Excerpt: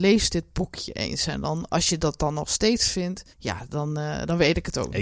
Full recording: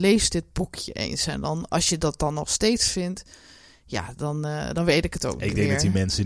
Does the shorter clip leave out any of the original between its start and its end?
yes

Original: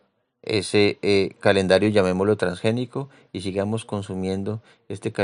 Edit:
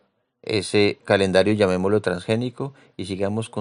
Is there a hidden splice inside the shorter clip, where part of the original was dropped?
yes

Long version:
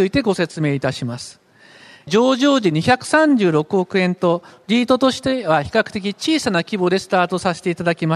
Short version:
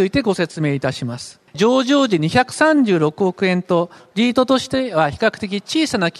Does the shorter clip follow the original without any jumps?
no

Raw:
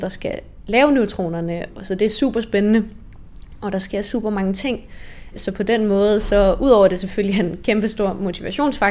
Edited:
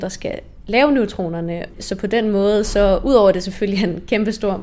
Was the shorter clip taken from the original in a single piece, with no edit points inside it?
no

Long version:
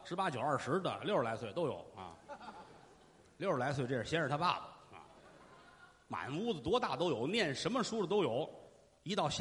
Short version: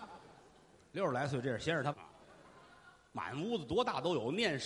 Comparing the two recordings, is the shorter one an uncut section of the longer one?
no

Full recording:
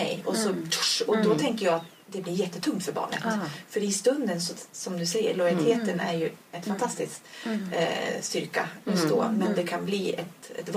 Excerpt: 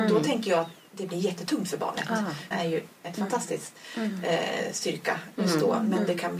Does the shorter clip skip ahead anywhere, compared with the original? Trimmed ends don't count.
yes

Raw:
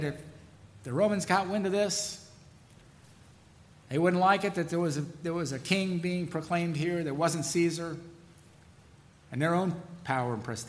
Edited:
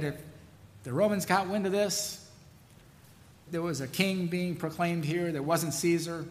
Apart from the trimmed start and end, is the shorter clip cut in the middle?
yes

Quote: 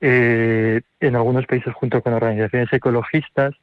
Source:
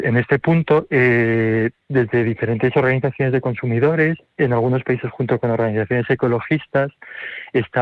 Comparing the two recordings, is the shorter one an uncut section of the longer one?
no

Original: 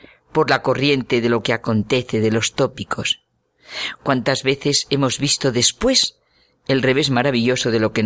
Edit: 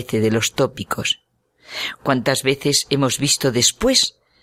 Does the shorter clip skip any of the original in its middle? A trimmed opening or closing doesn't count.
no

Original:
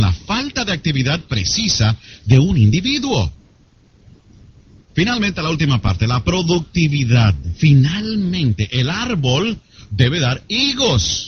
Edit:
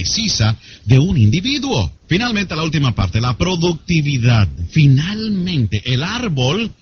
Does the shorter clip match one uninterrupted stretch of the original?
no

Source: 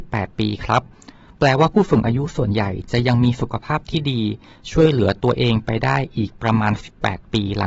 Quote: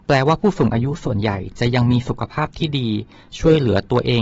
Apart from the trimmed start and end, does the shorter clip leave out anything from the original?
no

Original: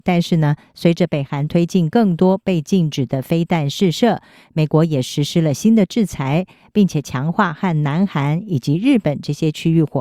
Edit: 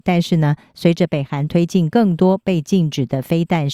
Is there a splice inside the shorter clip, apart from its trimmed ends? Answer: no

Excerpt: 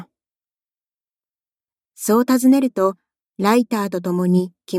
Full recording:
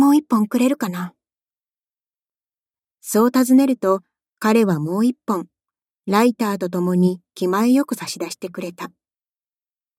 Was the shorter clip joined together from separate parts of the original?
yes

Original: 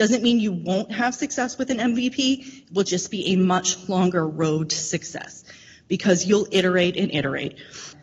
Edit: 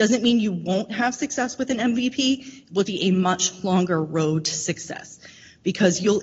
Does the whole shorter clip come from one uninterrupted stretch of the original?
no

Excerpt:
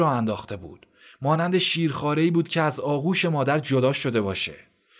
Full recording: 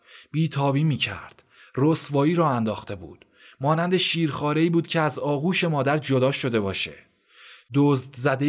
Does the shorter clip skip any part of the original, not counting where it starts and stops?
no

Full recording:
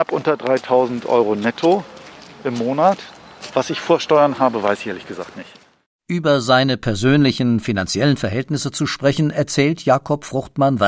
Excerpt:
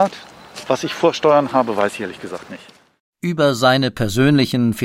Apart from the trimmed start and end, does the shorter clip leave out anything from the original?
no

